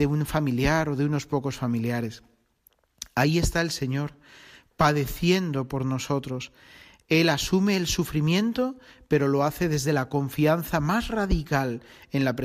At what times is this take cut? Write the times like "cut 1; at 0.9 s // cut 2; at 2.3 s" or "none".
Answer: none